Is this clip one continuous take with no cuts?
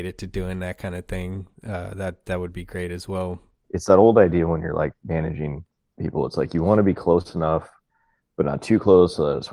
no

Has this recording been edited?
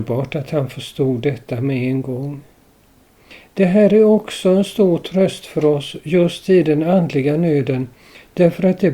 no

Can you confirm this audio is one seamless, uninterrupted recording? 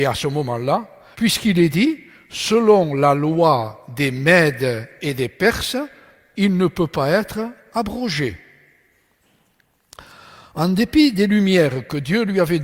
no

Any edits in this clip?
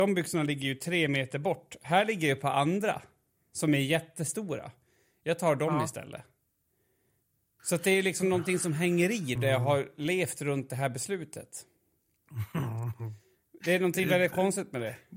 yes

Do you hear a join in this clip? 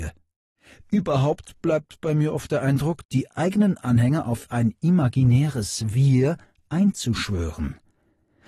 yes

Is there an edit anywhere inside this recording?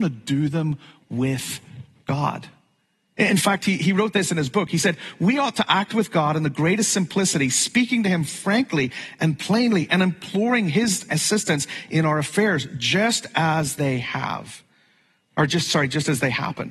no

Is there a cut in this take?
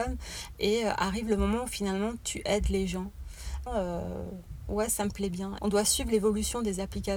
yes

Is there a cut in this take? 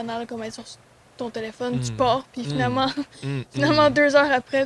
no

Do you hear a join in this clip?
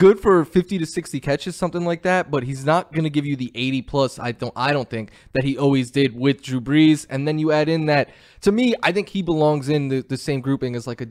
no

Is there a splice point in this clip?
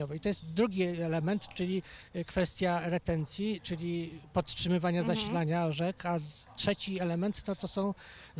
no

